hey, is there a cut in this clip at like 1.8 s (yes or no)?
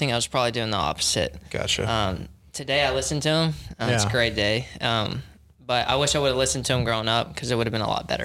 no